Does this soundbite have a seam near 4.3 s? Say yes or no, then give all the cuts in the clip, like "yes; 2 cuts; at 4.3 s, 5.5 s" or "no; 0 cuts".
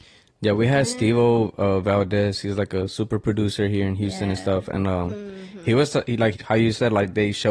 no; 1 cut; at 6.3 s